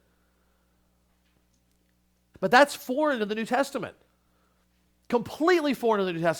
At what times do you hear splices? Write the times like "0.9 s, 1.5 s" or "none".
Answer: 2.3 s